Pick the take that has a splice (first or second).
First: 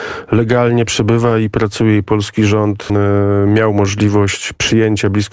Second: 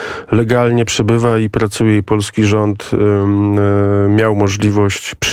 first